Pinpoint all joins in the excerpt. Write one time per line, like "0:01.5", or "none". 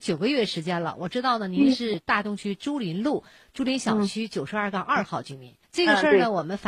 0:05.6